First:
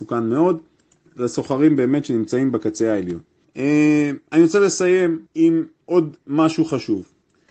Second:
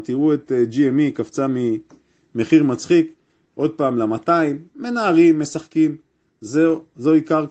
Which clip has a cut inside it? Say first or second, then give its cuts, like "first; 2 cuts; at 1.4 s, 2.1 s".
first; 2 cuts; at 3.4 s, 5.3 s